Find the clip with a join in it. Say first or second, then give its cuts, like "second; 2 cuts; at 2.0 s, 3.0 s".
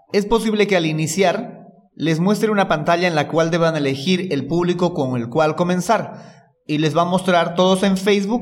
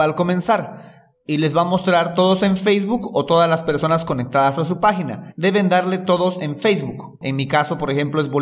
second; 1 cut; at 7.2 s